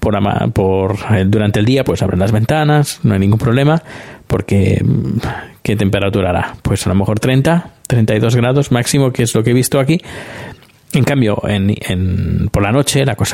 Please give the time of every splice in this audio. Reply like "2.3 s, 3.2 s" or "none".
none